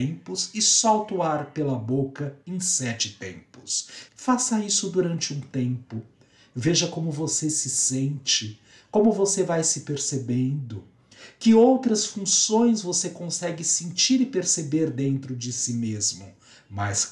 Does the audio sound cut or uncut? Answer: cut